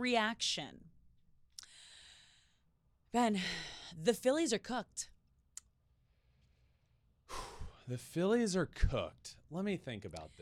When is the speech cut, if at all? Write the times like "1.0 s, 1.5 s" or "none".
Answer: none

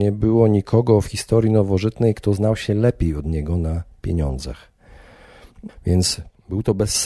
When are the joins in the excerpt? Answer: 5.7 s

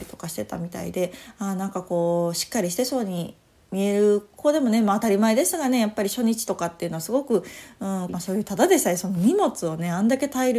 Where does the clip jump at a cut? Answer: 8.1 s

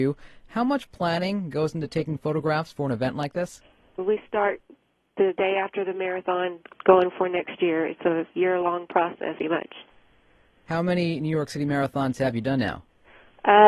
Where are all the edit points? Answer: 9.4 s

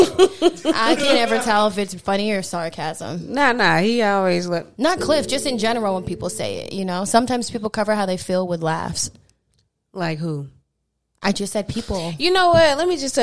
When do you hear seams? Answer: none

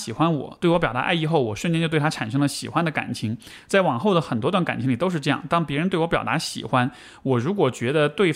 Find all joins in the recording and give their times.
none

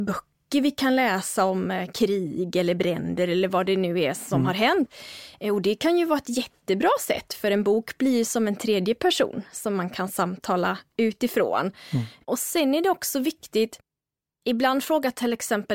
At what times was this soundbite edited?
12.2 s

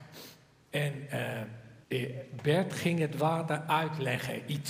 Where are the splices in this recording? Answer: 1.8 s

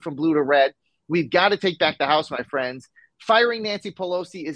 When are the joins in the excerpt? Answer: none

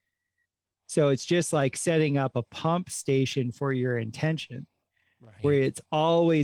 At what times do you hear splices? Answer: none

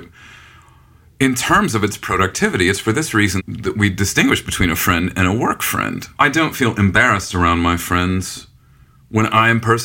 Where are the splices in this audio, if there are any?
3.4 s, 6.1 s

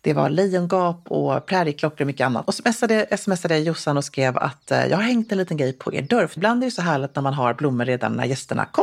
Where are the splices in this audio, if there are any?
2.4 s, 6.4 s

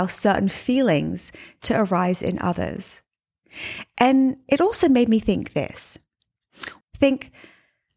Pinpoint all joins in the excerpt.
6.8 s

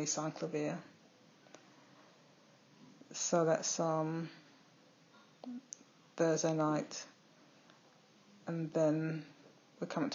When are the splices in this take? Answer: none

